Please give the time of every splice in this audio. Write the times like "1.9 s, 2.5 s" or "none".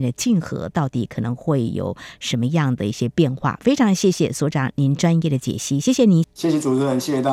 6.2 s